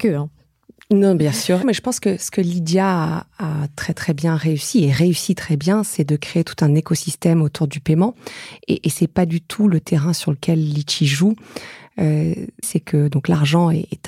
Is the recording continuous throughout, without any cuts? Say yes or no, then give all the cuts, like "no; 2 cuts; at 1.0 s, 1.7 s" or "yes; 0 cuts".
no; 2 cuts; at 1.6 s, 12.6 s